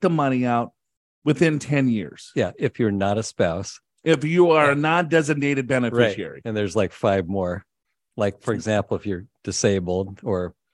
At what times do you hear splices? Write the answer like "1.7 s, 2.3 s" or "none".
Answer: none